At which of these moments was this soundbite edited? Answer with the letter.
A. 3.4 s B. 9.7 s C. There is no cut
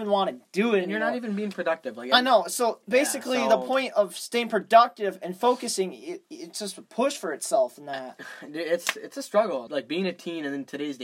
B